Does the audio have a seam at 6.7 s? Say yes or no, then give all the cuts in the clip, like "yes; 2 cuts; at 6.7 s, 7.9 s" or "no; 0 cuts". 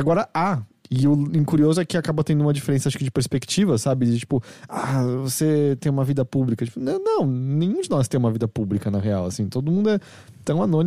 no; 0 cuts